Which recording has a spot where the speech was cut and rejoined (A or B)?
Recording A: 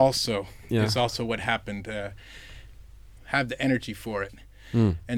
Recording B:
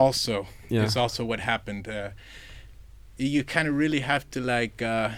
A